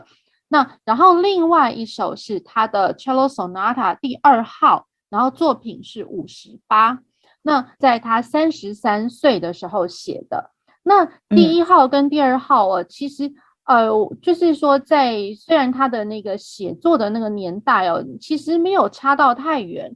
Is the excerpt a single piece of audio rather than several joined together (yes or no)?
yes